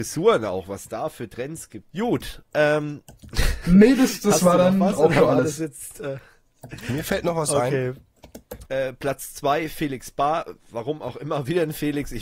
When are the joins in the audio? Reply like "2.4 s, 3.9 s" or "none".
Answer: 1.9 s, 8.6 s